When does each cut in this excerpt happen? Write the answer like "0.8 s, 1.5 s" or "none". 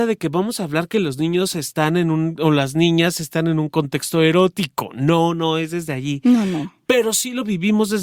none